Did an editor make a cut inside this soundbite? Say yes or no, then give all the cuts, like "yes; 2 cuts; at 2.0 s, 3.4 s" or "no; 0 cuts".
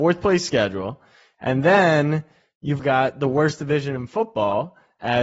yes; 2 cuts; at 1.3 s, 2.8 s